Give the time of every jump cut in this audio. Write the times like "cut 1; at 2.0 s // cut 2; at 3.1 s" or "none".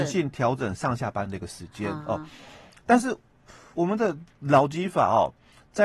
cut 1; at 3.7 s